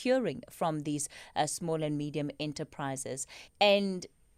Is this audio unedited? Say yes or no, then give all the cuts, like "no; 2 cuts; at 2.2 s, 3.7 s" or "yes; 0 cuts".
no; 1 cut; at 3.5 s